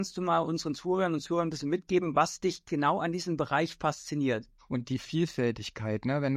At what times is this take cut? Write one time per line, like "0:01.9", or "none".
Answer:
0:04.6